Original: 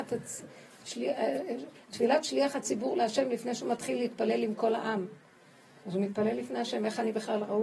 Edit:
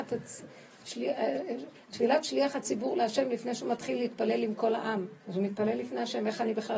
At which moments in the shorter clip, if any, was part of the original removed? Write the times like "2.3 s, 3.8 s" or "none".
5.2 s